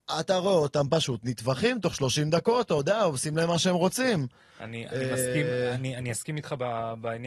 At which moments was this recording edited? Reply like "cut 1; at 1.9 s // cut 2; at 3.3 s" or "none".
none